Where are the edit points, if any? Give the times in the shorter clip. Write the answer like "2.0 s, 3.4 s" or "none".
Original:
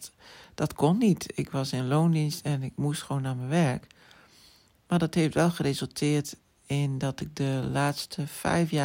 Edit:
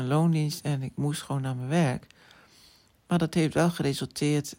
none